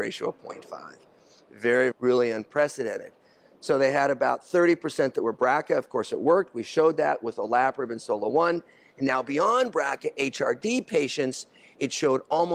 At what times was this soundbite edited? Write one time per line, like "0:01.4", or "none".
0:01.9